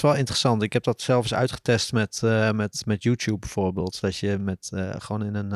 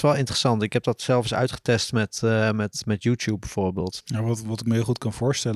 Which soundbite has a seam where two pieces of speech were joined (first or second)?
second